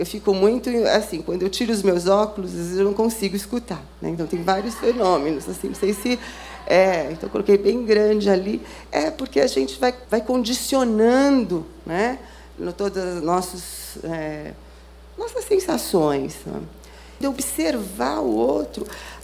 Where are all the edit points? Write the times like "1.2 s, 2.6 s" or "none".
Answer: 10.1 s, 17.2 s